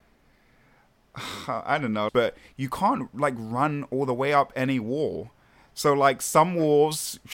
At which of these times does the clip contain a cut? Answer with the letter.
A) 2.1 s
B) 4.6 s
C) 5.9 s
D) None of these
A